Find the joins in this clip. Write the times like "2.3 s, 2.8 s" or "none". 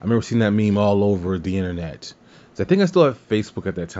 none